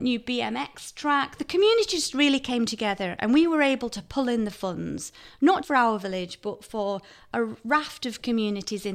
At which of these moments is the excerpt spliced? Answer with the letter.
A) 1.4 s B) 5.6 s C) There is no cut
B